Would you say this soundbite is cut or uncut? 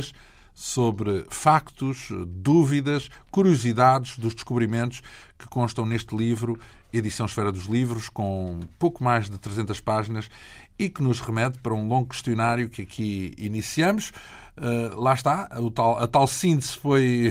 uncut